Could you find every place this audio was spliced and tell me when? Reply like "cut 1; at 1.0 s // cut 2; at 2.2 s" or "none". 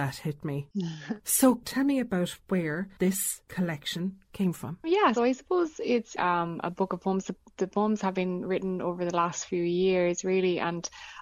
cut 1; at 5.2 s // cut 2; at 6.2 s